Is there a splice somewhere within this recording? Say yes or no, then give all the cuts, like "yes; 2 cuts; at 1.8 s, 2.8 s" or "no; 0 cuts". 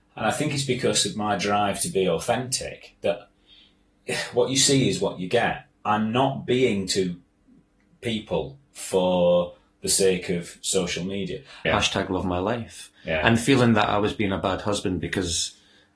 yes; 1 cut; at 11.6 s